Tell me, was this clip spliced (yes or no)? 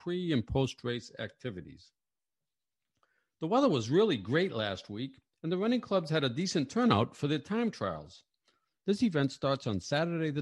yes